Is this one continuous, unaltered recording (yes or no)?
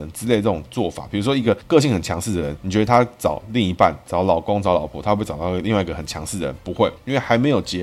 yes